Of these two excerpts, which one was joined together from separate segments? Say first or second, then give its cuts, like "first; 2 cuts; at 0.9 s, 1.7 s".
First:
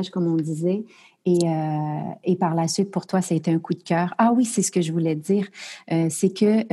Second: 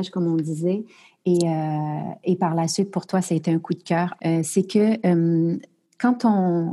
second; 1 cut; at 4.2 s